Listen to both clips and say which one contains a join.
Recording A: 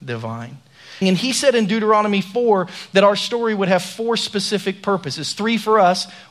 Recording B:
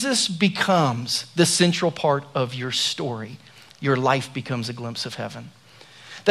A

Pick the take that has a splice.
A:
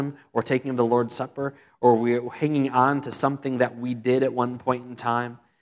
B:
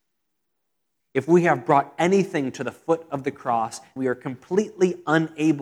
B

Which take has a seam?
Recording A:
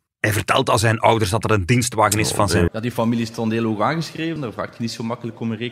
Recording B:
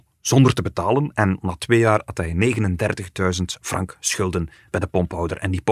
A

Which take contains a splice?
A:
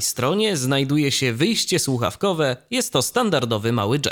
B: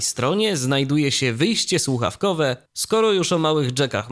B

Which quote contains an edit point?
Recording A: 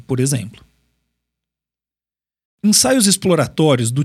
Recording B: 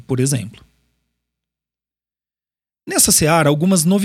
A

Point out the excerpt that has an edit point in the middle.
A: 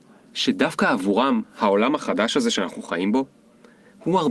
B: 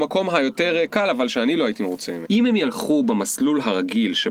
B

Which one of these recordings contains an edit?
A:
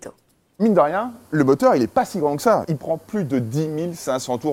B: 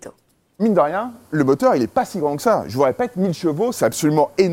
A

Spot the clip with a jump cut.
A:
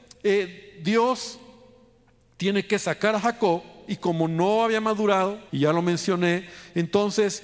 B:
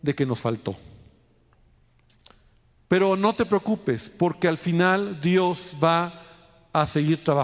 A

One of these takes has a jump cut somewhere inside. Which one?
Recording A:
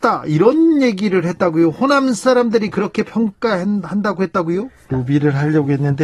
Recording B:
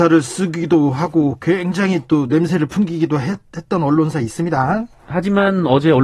A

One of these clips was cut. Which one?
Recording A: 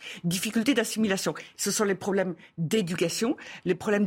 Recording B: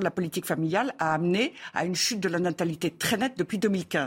A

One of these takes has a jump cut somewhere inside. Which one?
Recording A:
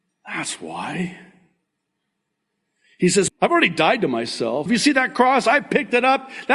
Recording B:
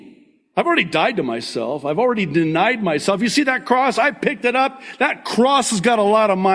A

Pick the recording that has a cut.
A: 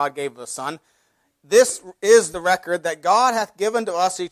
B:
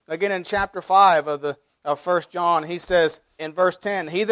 B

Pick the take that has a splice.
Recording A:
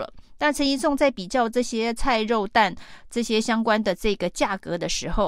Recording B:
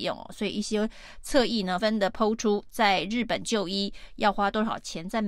B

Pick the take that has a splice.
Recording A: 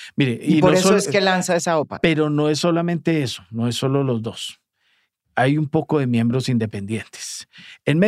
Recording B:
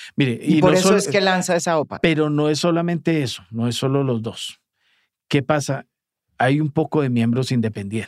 A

